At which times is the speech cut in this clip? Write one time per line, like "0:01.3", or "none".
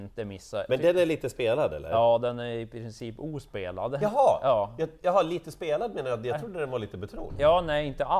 none